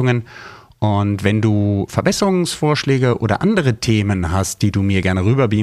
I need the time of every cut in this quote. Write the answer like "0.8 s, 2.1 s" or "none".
none